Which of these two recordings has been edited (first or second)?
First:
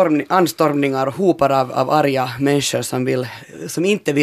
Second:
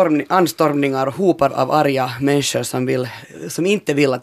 second